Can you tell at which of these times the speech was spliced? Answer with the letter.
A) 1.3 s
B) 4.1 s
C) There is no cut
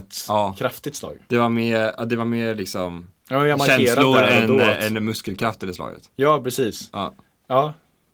C